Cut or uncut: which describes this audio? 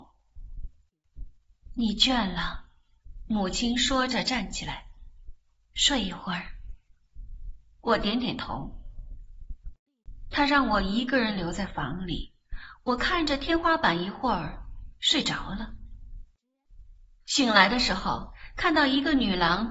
uncut